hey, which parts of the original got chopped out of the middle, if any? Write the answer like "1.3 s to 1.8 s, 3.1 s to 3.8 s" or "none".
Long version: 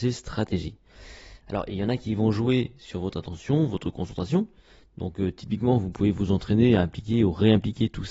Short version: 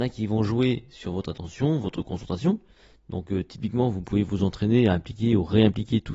none